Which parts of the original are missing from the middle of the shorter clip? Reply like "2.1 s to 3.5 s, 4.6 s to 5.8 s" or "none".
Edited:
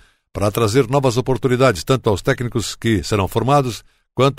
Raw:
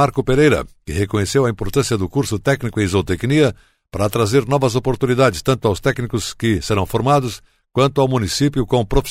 none